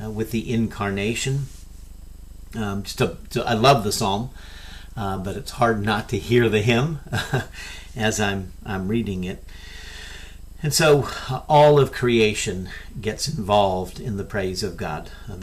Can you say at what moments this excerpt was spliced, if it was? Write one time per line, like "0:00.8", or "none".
none